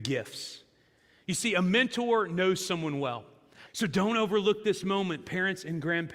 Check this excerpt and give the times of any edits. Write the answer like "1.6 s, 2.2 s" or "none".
3.7 s